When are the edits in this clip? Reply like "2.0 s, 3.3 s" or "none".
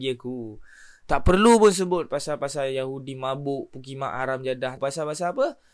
4.8 s

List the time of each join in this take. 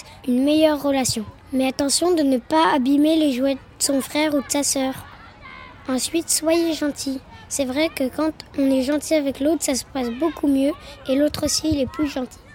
none

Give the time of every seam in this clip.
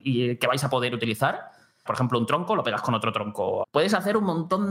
1.9 s, 3.6 s

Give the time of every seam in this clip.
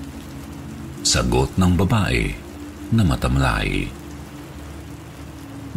1.0 s

